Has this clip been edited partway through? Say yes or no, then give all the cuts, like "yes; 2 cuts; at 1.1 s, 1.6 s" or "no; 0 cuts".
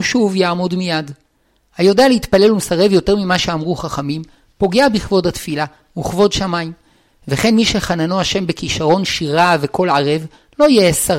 no; 0 cuts